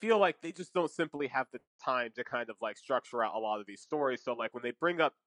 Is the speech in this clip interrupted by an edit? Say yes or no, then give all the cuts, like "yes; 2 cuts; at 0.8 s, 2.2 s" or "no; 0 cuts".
no; 0 cuts